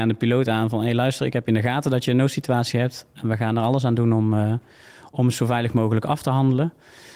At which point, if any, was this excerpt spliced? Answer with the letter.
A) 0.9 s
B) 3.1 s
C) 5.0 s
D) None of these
D